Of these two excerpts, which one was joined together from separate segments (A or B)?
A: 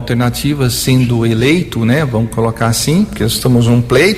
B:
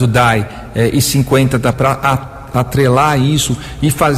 B